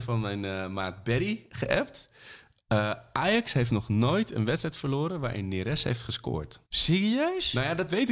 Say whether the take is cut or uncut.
cut